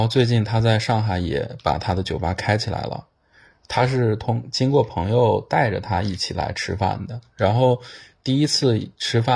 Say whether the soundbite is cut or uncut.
uncut